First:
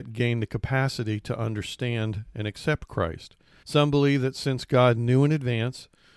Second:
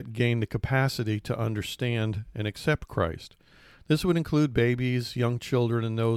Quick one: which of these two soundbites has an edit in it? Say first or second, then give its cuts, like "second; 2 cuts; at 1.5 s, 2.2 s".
first; 1 cut; at 3.6 s